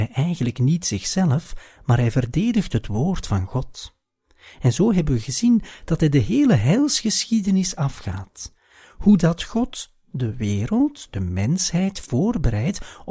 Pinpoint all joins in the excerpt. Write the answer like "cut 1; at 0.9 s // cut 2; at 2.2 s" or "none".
none